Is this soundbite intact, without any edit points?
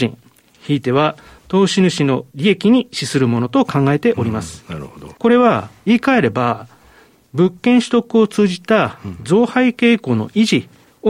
yes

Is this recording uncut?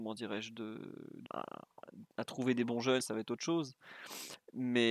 no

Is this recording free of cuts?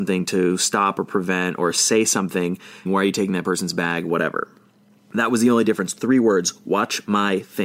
no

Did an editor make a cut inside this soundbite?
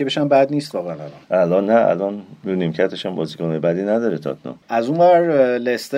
yes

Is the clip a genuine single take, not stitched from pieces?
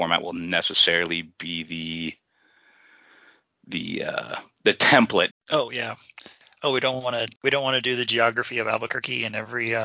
no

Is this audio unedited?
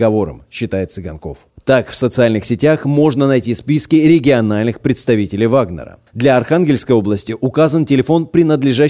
no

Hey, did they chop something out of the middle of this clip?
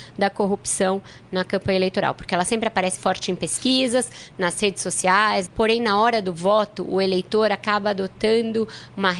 yes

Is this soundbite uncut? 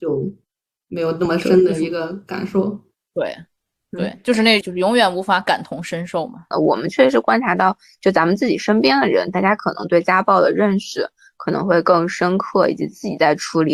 no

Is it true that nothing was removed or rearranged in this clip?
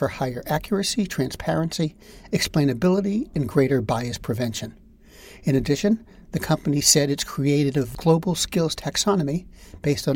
yes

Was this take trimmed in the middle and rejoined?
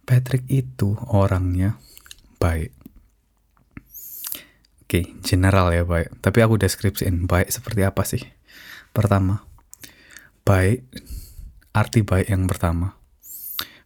no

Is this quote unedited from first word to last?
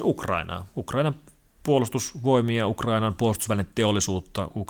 yes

